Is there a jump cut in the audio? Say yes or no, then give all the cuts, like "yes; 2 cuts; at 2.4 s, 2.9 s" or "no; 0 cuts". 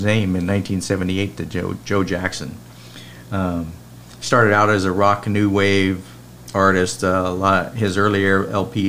no; 0 cuts